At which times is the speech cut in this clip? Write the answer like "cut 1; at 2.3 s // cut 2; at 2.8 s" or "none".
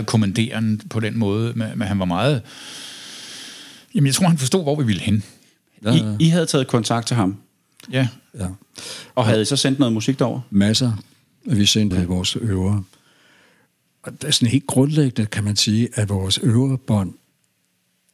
cut 1; at 11.9 s